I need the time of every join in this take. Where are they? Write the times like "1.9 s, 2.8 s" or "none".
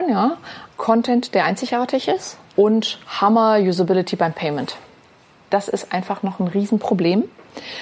none